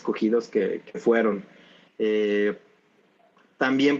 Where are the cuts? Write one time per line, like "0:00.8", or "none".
0:01.9